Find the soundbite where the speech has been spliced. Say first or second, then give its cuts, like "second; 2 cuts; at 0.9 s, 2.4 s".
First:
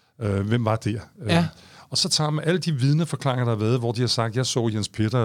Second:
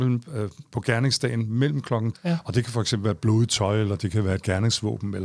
second; 1 cut; at 2.1 s